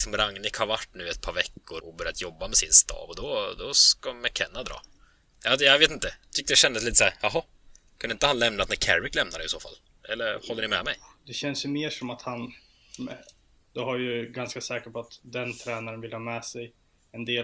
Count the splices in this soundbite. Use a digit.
2